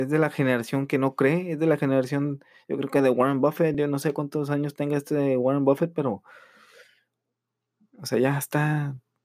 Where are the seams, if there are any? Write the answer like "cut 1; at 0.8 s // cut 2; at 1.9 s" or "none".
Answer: none